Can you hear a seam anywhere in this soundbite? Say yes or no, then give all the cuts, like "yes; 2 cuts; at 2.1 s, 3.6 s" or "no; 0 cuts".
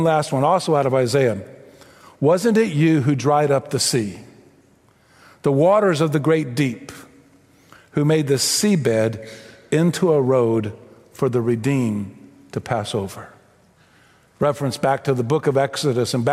no; 0 cuts